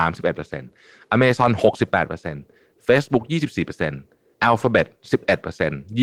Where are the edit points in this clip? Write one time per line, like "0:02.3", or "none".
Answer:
none